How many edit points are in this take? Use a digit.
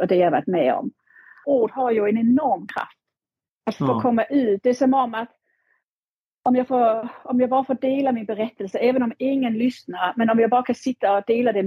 1